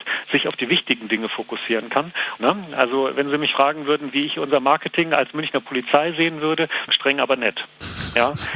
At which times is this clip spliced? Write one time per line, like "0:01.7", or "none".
0:02.4
0:06.9